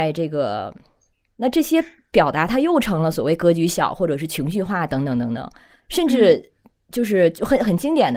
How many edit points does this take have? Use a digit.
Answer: 2